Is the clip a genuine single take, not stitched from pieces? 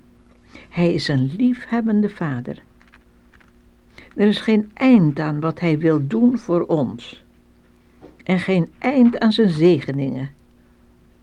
yes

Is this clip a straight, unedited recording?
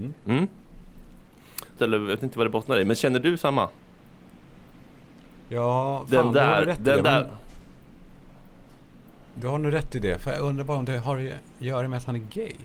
no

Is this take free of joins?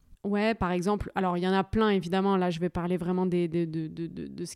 yes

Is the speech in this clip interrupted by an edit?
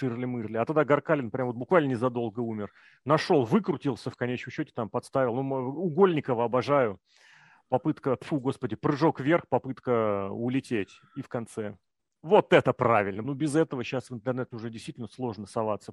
yes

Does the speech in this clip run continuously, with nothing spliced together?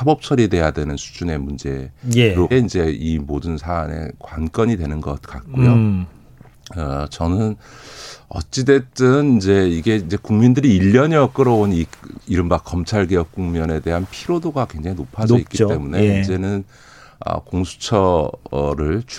no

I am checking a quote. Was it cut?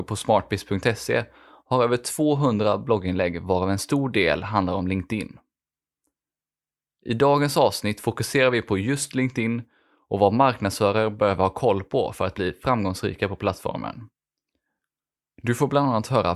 no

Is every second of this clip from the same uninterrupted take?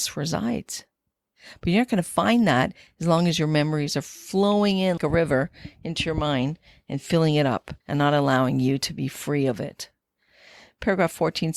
no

